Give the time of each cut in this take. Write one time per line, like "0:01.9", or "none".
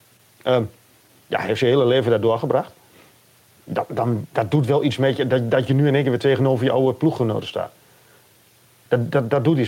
none